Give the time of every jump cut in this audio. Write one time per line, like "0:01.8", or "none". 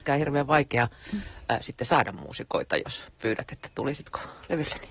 none

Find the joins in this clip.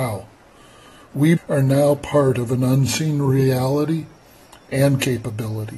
0:01.4

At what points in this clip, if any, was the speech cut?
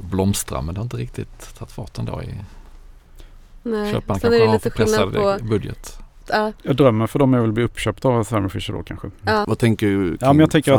0:06.2
0:09.4

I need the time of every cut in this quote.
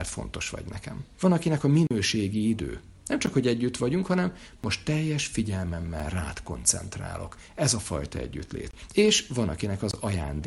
0:01.1

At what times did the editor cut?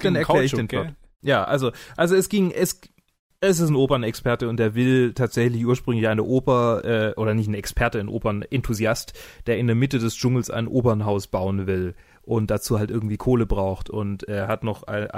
none

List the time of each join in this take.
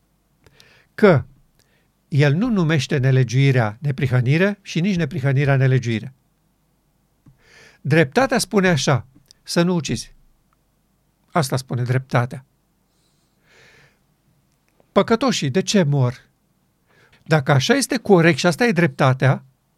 0:17.1

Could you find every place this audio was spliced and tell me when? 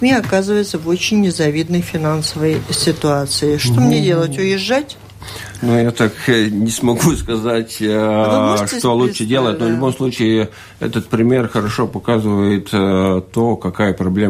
0:05.6

